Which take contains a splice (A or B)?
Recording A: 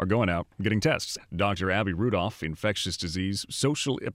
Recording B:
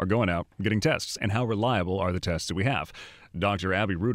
A